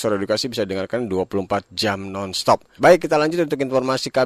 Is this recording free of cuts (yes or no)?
no